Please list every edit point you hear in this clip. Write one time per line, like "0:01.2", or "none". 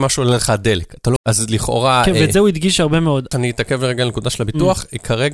0:01.2
0:03.3